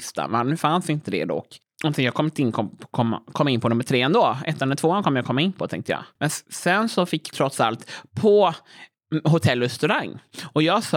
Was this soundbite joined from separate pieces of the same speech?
yes; 1 cut; at 7.3 s

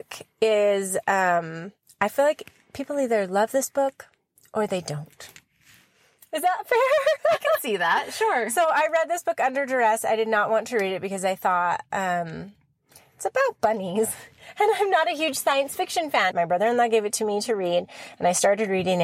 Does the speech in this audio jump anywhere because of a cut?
yes; 1 cut; at 16.3 s

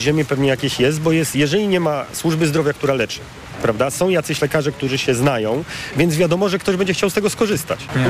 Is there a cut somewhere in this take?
no; 0 cuts

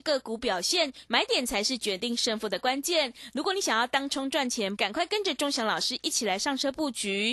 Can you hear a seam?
yes; 2 cuts; at 1.1 s, 4.8 s

